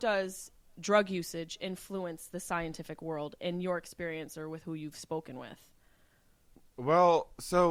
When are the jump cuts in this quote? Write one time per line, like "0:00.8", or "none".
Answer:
none